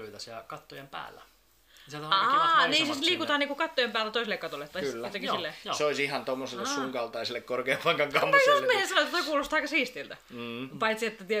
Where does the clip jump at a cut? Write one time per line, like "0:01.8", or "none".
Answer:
none